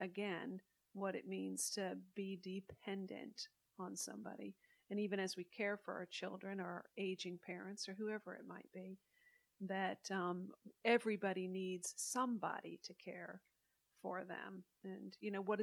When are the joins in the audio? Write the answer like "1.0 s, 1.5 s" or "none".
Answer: none